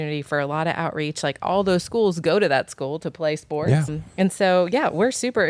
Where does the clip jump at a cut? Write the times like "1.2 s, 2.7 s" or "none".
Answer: 3.9 s